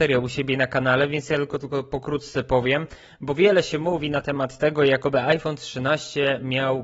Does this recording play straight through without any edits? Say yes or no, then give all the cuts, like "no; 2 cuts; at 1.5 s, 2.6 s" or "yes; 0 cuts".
yes; 0 cuts